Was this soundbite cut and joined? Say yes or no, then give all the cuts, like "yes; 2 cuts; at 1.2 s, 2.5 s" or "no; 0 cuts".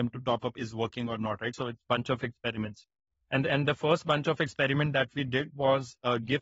no; 0 cuts